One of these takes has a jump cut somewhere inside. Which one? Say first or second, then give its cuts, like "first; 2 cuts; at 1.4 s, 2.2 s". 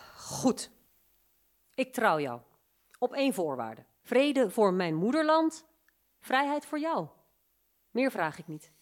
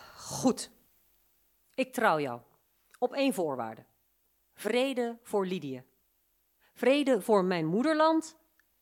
first; 1 cut; at 4.0 s